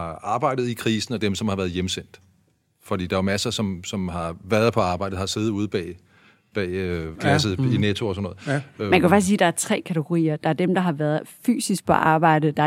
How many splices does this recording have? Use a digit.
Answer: 1